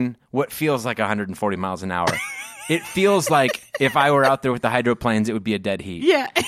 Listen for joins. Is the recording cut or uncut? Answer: uncut